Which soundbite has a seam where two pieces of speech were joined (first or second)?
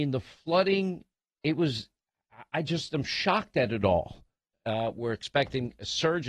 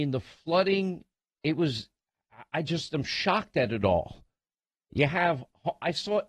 first